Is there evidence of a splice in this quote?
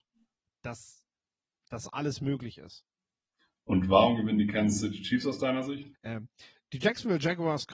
yes; 1 cut; at 5.9 s

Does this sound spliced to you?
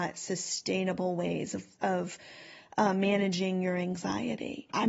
no; 0 cuts

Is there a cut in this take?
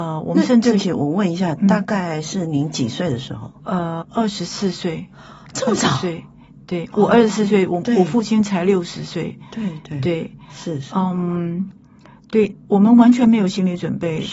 yes; 1 cut; at 4.0 s

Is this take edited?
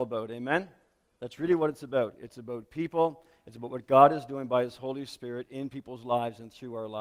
no; 0 cuts

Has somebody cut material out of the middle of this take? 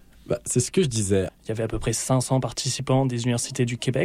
yes; 1 cut; at 1.3 s

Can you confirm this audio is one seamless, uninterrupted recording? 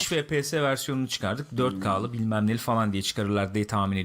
yes; 0 cuts

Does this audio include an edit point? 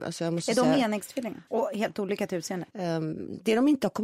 yes; 2 cuts; at 1.5 s, 2.7 s

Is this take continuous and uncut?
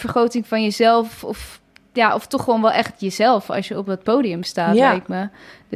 yes; 0 cuts

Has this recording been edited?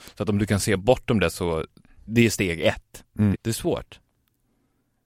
yes; 2 cuts; at 2.1 s, 3.3 s

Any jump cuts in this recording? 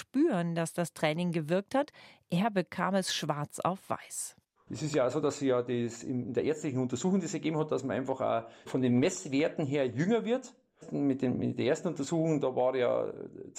no; 0 cuts

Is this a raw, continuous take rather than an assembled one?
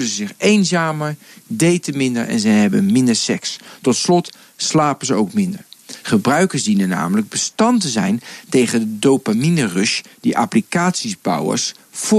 no; 1 cut; at 6.0 s

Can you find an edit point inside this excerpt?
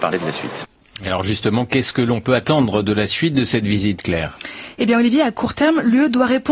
no; 0 cuts

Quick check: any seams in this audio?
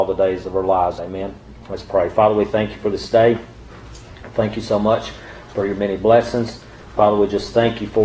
yes; 1 cut; at 1.0 s

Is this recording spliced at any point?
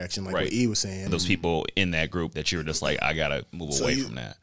yes; 1 cut; at 1.1 s

